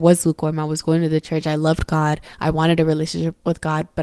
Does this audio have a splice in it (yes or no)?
no